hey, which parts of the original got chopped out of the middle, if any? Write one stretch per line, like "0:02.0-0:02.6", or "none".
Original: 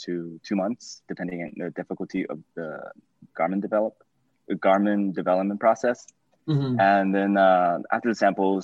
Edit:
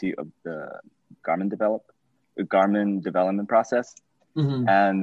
none